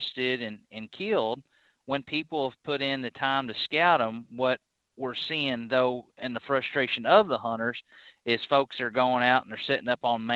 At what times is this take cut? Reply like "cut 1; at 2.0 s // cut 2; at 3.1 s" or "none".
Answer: none